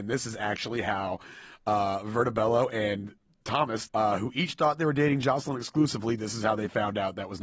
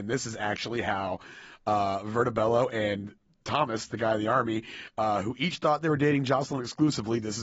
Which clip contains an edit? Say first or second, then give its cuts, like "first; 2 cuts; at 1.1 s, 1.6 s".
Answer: first; 1 cut; at 3.9 s